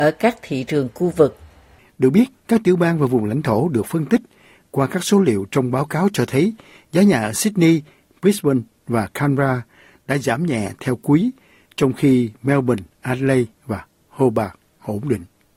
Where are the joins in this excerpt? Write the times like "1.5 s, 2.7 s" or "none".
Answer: none